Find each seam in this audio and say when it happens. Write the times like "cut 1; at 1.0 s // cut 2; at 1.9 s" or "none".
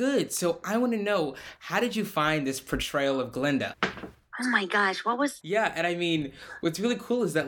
cut 1; at 3.7 s // cut 2; at 5.4 s